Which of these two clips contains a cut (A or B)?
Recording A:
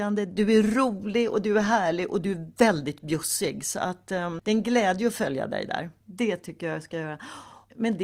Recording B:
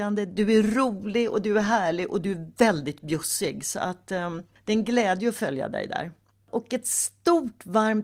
A